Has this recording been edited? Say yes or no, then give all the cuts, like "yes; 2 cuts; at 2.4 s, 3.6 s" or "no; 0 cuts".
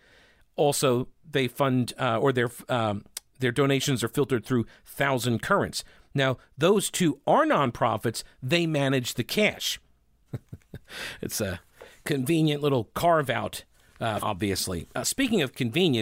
yes; 2 cuts; at 10.3 s, 14.2 s